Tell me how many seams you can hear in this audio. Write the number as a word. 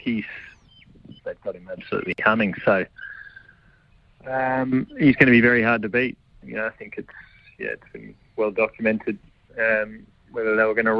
one